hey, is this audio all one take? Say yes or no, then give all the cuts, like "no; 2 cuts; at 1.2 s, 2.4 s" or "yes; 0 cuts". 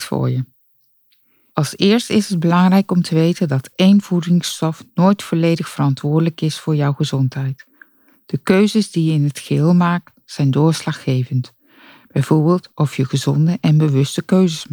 yes; 0 cuts